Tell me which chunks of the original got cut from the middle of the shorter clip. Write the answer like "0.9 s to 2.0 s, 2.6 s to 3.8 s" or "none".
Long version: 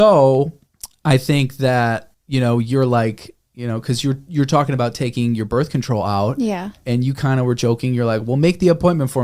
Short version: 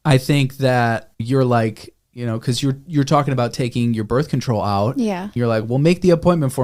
2.2 s to 2.6 s, 6.8 s to 7.9 s